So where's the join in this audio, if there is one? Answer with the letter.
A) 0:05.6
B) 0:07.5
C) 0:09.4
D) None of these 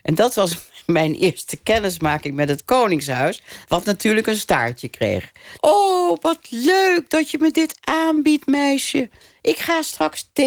A